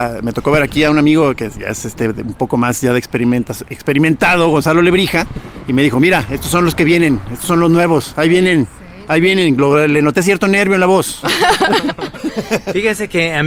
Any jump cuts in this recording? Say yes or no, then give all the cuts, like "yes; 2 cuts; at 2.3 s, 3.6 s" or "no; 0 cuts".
no; 0 cuts